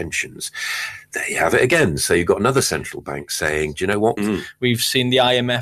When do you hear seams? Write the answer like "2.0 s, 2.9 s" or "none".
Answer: 4.2 s